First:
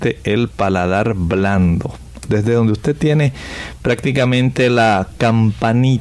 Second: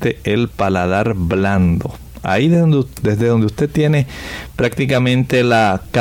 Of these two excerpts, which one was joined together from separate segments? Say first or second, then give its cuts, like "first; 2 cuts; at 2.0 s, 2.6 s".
first; 1 cut; at 2.2 s